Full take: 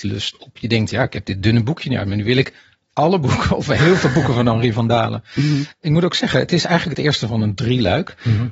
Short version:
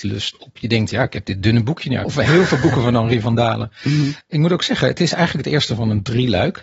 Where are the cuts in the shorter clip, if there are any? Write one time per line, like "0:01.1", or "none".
0:02.0